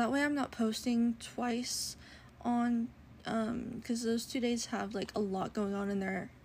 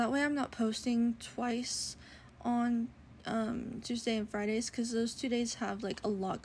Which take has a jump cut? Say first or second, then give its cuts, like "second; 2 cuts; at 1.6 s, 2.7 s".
first; 1 cut; at 3.8 s